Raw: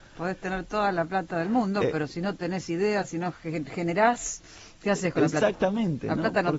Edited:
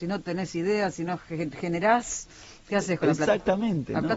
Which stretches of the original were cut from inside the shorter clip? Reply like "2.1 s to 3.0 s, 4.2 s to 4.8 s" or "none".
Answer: none